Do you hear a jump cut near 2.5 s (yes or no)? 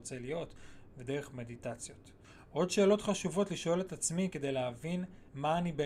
no